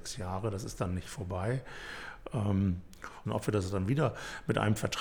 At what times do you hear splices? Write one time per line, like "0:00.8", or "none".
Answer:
0:03.3